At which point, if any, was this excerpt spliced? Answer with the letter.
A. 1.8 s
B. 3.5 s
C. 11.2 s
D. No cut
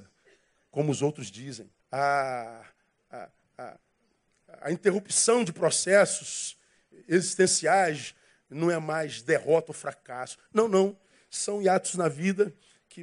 A